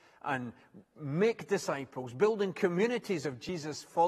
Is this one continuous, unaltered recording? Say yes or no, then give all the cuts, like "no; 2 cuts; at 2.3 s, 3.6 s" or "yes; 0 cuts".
yes; 0 cuts